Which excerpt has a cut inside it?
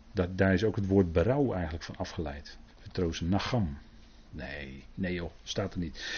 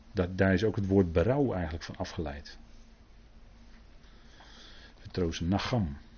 first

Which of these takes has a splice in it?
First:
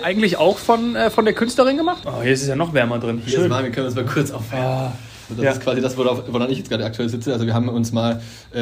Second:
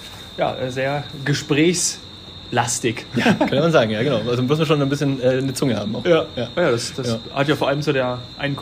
first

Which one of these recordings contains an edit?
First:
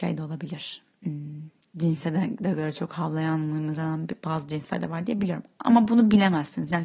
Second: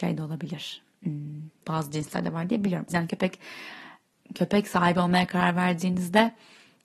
second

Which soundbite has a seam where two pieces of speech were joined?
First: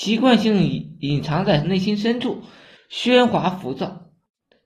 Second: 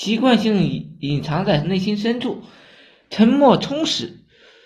first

